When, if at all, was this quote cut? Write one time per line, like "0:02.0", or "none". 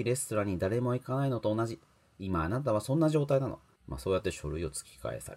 0:03.8

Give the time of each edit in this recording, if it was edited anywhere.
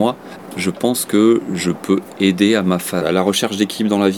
0:03.0

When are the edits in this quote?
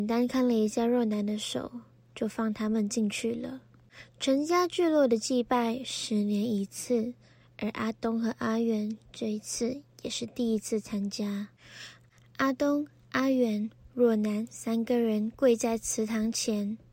none

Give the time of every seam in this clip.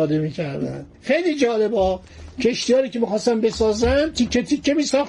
0:00.9

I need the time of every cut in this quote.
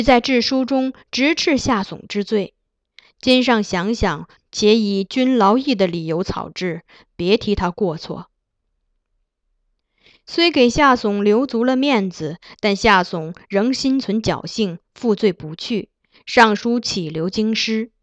0:04.4

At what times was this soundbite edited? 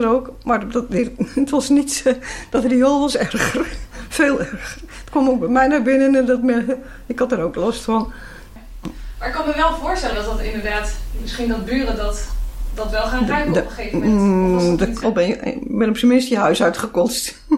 0:10.1
0:15.0

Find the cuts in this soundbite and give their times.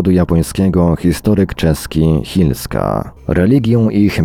0:03.2

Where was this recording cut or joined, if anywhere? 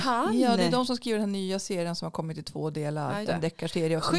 0:03.2

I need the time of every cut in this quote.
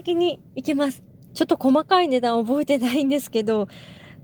0:01.3

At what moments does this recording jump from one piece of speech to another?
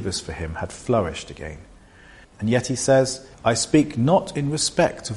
0:02.2
0:03.3

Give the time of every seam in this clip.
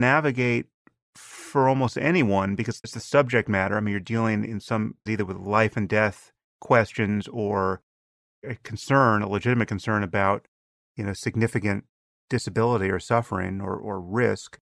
0:02.8
0:05.1

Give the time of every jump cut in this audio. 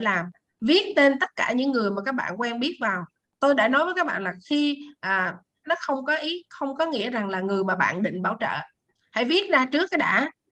0:05.6

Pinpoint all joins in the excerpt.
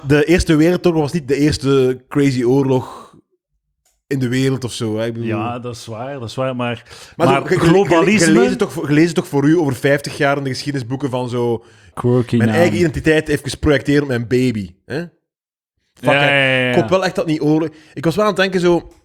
0:11.9

